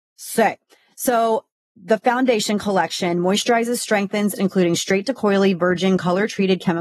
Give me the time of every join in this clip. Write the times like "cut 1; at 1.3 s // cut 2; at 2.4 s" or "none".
cut 1; at 4.4 s